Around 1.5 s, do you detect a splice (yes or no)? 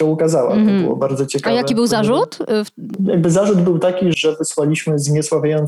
no